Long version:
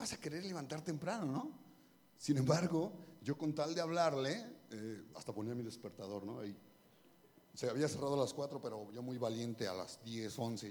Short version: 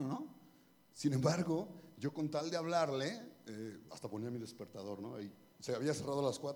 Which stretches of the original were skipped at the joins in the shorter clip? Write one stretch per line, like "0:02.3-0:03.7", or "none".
0:06.8-0:07.5